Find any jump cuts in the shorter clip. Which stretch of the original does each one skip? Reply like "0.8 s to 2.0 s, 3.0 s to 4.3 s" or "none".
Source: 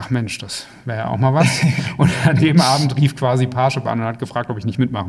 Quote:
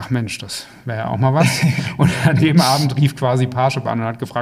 none